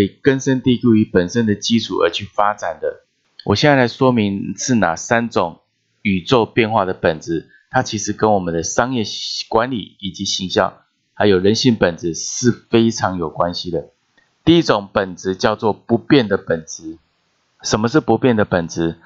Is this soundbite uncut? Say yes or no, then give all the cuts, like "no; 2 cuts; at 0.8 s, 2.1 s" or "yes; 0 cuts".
yes; 0 cuts